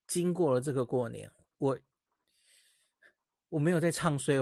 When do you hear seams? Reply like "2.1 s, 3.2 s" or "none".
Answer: none